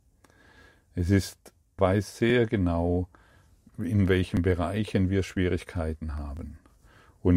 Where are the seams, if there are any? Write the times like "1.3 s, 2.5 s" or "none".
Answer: 1.8 s, 3.7 s